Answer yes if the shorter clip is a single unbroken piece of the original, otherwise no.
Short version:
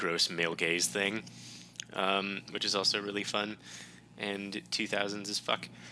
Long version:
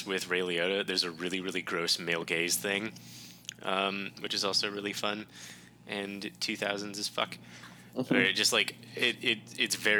yes